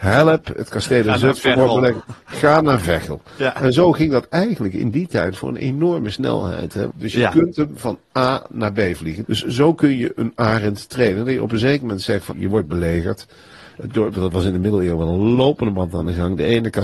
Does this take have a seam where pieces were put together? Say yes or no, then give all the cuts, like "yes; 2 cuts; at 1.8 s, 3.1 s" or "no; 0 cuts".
yes; 3 cuts; at 6.9 s, 9.2 s, 12.3 s